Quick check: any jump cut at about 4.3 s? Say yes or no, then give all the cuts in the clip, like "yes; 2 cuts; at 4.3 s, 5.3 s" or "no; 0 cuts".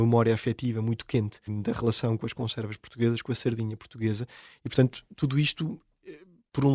no; 1 cut; at 1.5 s